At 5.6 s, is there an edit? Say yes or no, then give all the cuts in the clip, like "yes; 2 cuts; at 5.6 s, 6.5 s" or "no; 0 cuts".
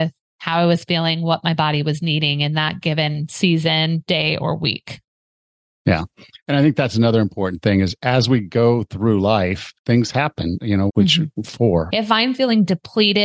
no; 3 cuts; at 9.8 s, 10.9 s, 11.9 s